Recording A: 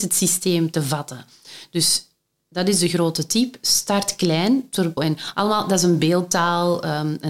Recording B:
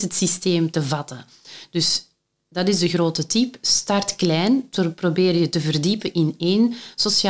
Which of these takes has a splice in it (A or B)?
A